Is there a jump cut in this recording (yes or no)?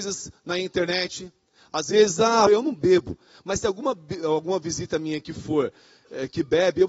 yes